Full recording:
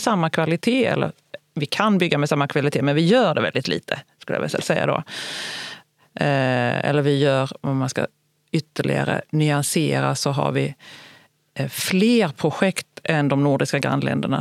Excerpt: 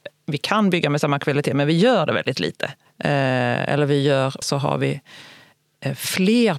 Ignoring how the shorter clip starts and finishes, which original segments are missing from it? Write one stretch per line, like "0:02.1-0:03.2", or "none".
0:04.1-0:06.0
0:07.6-0:10.2